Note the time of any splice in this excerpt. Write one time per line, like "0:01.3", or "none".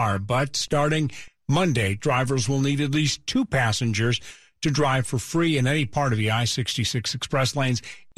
0:02.0